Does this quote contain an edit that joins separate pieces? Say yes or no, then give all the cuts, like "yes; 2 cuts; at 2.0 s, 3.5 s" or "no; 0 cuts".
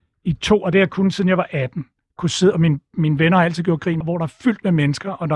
yes; 1 cut; at 4.0 s